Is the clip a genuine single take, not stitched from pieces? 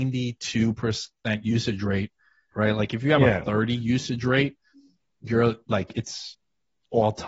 no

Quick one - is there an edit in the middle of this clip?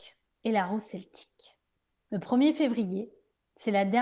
no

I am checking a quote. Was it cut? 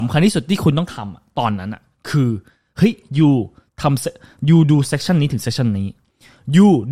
no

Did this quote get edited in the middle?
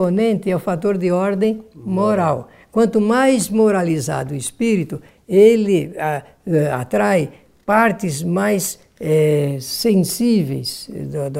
no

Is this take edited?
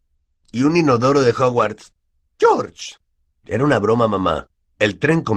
no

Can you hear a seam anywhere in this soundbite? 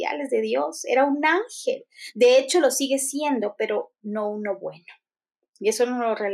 no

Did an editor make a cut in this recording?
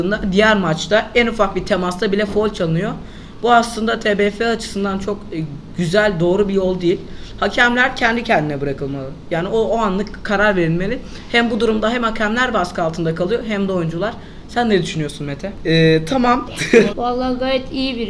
yes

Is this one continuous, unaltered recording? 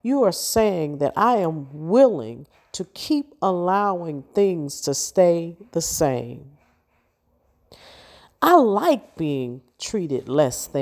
yes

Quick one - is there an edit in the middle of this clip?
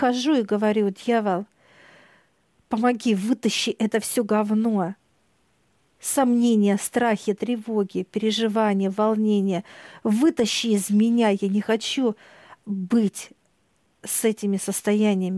no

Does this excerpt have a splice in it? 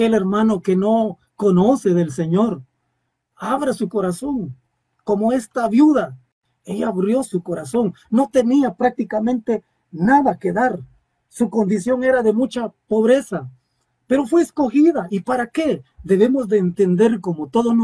no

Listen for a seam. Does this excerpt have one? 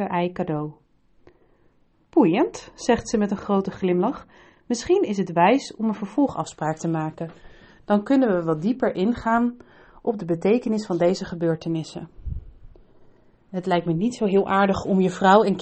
no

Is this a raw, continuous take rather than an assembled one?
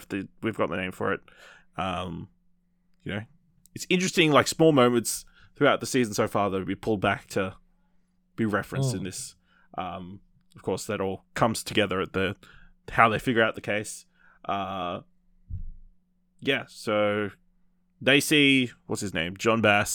no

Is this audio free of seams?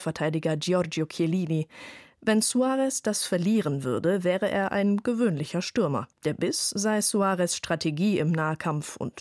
no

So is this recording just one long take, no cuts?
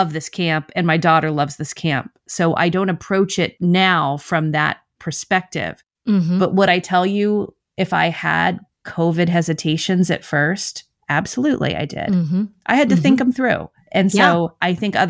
yes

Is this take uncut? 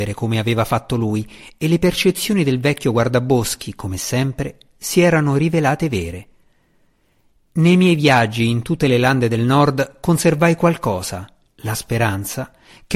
yes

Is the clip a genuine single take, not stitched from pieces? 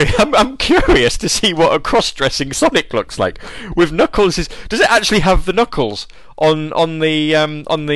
yes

